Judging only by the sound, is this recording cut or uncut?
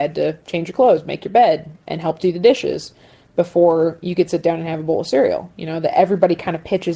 uncut